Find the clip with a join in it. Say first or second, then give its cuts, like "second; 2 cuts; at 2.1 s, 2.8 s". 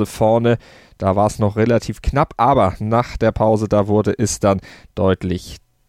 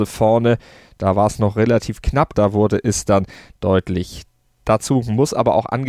second; 1 cut; at 2.3 s